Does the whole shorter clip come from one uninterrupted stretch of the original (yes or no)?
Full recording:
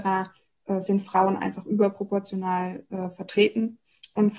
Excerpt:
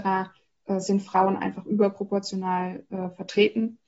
yes